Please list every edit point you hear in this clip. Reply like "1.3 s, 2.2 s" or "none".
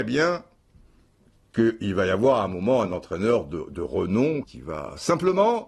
4.4 s